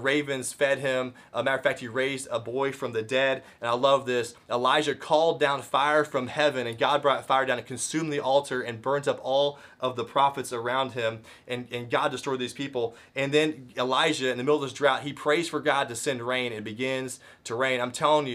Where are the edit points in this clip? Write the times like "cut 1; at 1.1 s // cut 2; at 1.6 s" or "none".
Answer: none